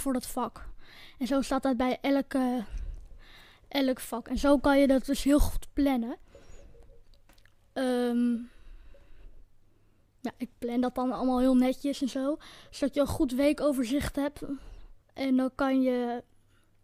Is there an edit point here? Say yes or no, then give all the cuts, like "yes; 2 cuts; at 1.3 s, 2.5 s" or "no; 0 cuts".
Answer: yes; 1 cut; at 15.0 s